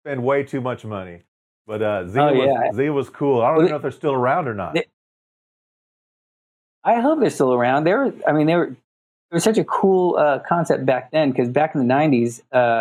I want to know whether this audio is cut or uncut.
uncut